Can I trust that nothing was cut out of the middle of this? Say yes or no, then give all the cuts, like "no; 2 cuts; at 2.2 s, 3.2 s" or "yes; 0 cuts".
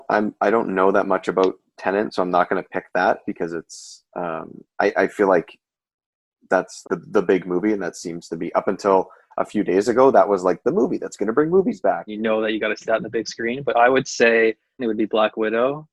no; 3 cuts; at 6.8 s, 12.1 s, 14.8 s